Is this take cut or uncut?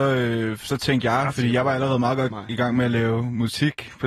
uncut